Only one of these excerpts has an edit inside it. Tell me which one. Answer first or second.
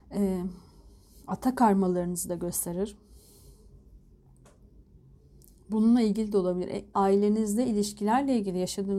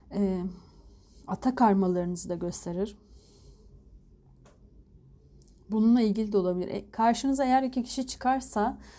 first